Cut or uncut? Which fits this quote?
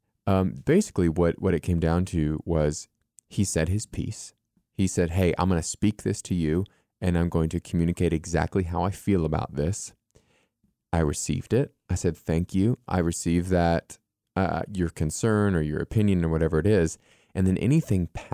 uncut